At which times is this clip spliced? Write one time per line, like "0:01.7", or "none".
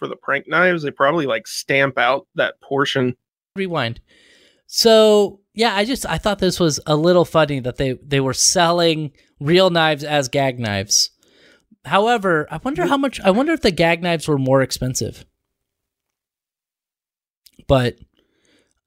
0:03.6